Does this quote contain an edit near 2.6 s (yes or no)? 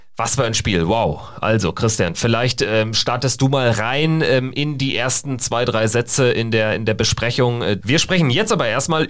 no